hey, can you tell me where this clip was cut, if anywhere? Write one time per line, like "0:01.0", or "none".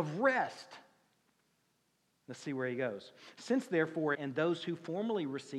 0:04.1